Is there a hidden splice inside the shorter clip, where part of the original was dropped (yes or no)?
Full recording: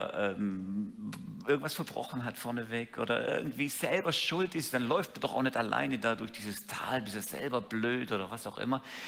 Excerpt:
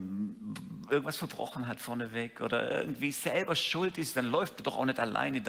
no